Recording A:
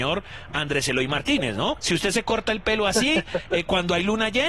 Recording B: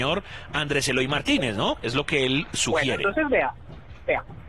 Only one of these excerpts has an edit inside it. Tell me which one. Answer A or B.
A